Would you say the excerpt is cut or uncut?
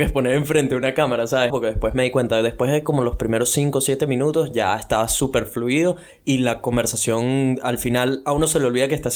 cut